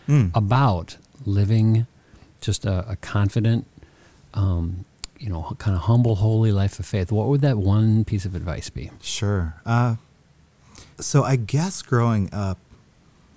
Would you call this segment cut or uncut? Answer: cut